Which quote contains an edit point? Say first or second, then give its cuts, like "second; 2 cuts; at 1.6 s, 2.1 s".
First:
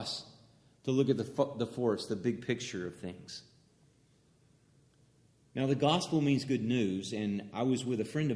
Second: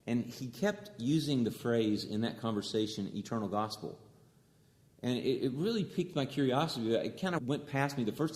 second; 1 cut; at 7.4 s